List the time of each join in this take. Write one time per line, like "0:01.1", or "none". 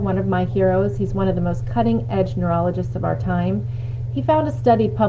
none

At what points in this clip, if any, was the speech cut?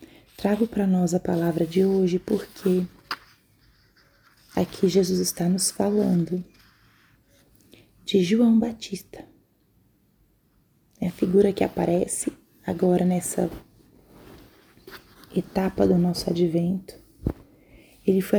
none

